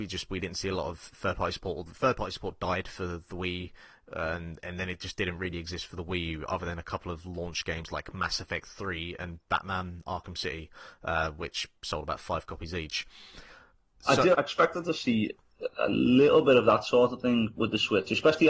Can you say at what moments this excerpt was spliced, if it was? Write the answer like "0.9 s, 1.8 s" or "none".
14.3 s